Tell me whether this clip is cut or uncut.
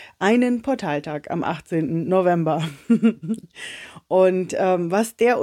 uncut